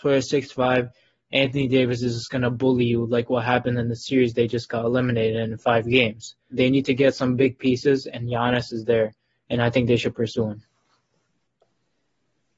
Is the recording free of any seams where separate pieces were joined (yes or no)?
no